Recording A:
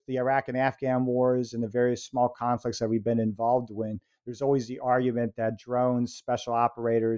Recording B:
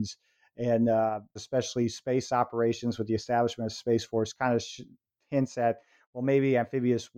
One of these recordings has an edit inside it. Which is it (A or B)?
B